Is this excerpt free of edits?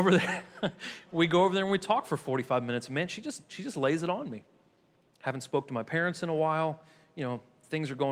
yes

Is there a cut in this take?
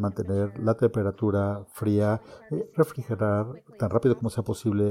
no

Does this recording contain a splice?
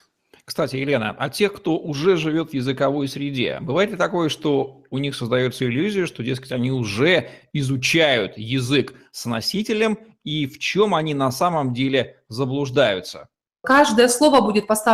yes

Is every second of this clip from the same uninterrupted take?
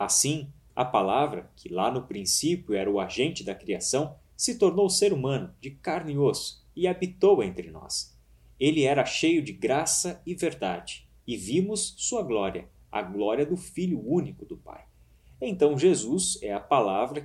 no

